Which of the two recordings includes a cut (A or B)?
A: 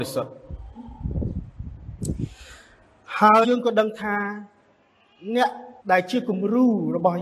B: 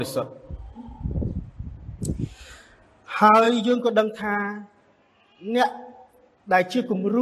A